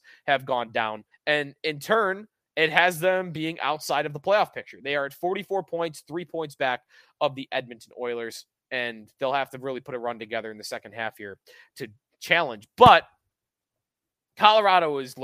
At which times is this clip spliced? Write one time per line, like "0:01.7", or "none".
0:01.1